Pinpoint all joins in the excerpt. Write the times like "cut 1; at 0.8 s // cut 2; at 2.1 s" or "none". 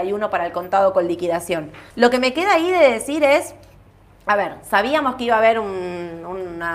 cut 1; at 1.9 s